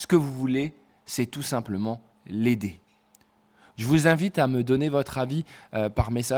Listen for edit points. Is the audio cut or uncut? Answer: cut